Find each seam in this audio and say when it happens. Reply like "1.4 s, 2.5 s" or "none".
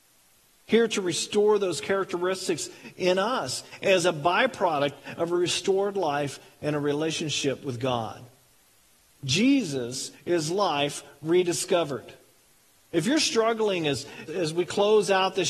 14.3 s

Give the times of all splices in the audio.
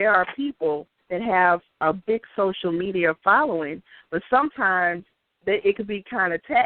none

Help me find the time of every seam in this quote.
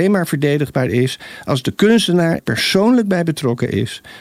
2.4 s

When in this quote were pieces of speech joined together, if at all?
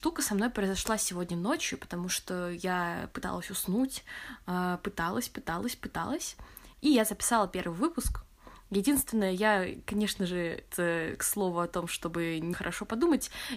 6.7 s, 10.7 s, 12.5 s

